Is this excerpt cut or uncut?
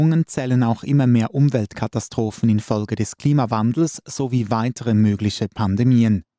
uncut